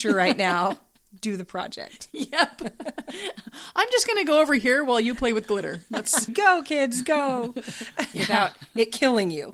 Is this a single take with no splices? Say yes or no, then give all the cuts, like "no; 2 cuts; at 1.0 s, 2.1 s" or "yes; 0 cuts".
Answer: no; 2 cuts; at 6.3 s, 8.1 s